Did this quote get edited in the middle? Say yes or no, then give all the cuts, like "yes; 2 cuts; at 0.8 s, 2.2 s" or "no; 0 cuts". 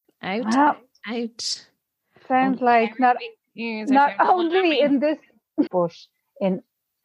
yes; 1 cut; at 5.7 s